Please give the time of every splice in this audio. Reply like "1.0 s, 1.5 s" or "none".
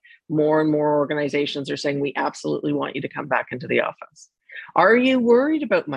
none